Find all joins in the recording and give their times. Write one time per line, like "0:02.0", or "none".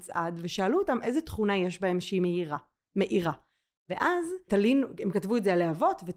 0:04.5